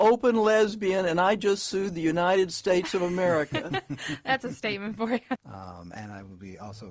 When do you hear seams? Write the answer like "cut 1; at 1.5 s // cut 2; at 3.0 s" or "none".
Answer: cut 1; at 5.4 s